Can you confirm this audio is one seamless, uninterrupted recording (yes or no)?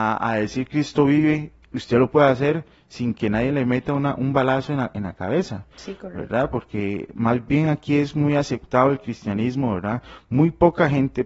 yes